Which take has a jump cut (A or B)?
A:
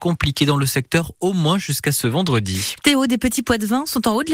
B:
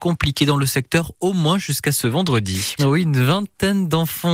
B